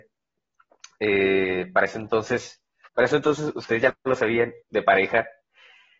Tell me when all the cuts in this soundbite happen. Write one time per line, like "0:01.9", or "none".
0:02.9
0:04.6